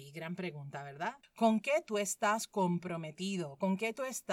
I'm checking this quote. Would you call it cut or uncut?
cut